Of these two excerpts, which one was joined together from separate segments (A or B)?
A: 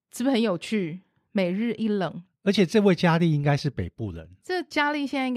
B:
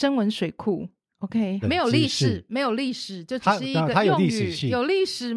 B